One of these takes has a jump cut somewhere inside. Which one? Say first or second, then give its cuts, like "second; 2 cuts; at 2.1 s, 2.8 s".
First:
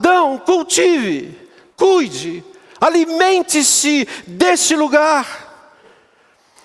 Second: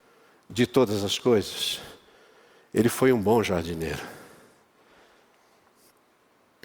first; 1 cut; at 1.7 s